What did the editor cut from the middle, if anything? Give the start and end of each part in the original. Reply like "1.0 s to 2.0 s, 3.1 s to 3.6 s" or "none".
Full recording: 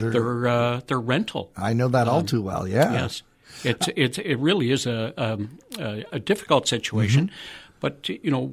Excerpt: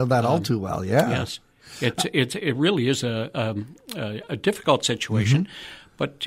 none